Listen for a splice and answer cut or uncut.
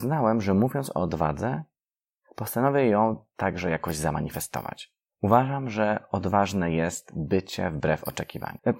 uncut